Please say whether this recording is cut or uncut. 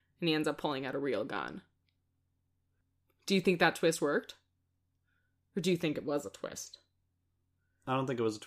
uncut